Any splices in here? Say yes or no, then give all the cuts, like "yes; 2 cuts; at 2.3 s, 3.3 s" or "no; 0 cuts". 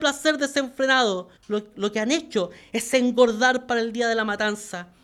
yes; 1 cut; at 1.4 s